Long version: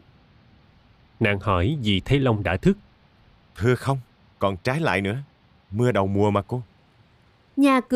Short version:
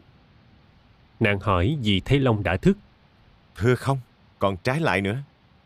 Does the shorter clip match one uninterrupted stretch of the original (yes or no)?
yes